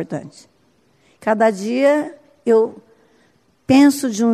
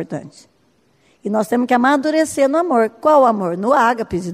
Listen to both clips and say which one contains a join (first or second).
first